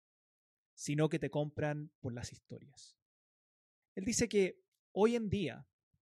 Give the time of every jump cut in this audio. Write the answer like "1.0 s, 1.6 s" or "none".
3.8 s